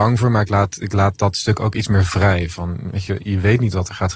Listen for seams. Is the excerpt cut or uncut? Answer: uncut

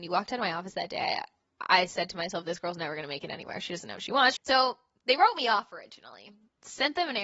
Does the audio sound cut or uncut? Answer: cut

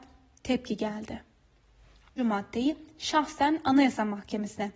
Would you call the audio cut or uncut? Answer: cut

